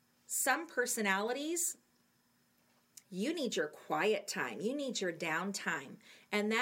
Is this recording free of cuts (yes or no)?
no